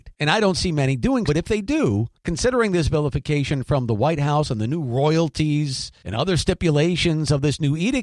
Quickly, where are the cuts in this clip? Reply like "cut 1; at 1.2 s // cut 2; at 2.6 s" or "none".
cut 1; at 1.3 s

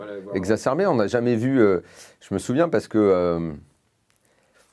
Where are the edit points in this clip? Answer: none

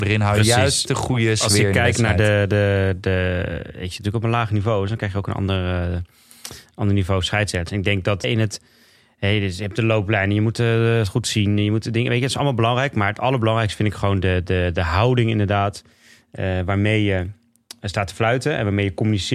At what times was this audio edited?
cut 1; at 8.2 s

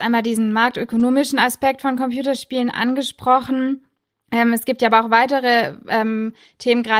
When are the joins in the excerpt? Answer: none

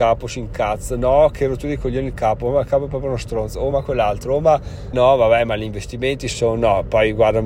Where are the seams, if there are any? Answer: cut 1; at 3.7 s // cut 2; at 4.9 s

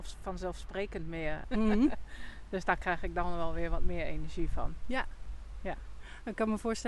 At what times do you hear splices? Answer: cut 1; at 1.4 s

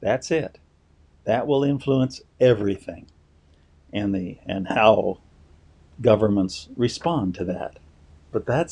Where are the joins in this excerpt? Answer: none

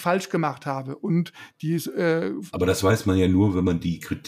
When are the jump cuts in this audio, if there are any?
none

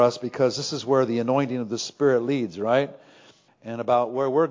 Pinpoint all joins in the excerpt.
cut 1; at 3.5 s

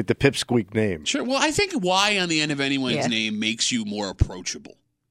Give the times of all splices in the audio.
none

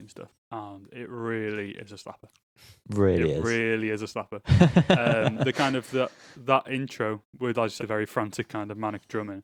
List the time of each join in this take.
cut 1; at 7.8 s

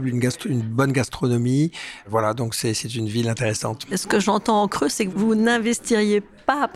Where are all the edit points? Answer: none

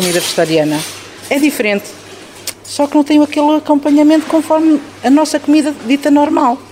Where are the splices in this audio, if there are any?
cut 1; at 2.5 s

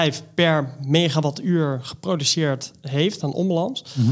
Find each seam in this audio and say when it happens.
none

